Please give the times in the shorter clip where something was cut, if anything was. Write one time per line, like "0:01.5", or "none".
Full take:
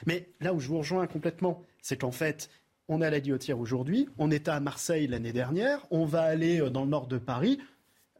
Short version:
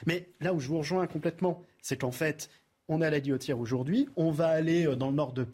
0:04.1